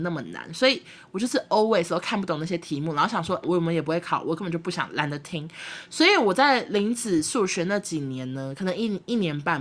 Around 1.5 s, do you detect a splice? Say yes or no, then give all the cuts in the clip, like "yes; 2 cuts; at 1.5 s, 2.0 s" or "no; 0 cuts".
no; 1 cut; at 3.4 s